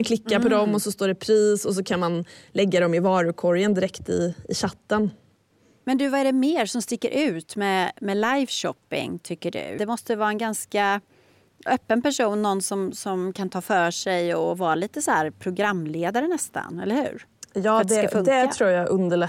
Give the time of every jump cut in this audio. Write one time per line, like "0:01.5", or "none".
0:09.8